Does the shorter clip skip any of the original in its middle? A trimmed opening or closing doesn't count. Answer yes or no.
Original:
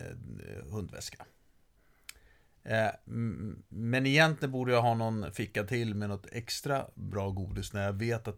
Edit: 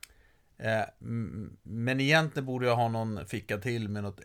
no